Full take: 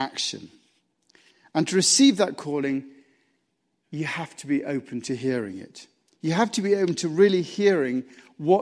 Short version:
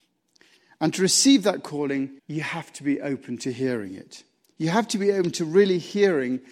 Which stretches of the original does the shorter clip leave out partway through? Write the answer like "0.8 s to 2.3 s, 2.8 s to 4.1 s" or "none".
2.9 s to 3.8 s